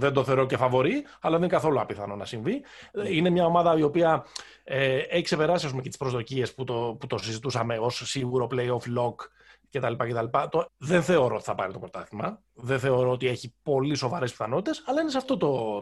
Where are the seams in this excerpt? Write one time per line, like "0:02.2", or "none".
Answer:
0:10.7